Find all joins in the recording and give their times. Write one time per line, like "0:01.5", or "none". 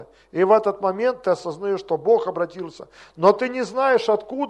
none